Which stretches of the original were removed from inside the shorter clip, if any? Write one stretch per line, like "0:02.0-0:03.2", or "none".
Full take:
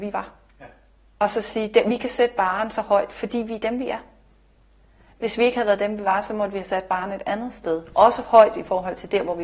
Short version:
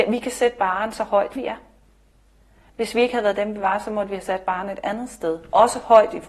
0:03.1-0:03.8